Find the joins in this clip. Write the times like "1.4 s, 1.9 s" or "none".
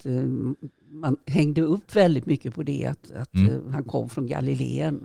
none